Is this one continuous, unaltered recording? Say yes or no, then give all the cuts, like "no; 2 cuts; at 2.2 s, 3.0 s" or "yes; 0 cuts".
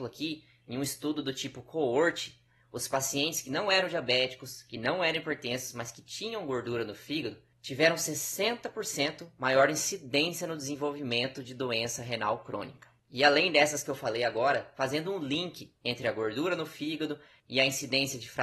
no; 1 cut; at 14.8 s